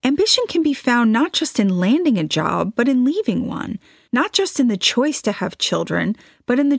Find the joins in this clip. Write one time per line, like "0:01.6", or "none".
0:04.1